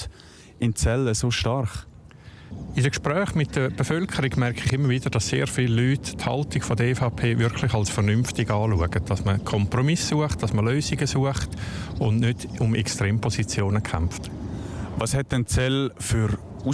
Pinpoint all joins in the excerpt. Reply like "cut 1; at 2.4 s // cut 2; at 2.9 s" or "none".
none